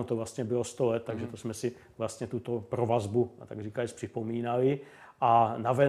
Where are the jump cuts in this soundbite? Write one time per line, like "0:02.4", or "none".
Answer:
none